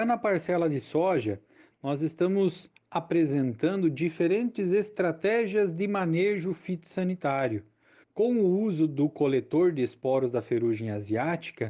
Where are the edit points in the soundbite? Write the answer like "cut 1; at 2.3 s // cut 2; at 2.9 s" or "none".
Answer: cut 1; at 8.0 s